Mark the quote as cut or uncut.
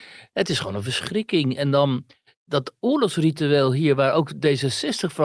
uncut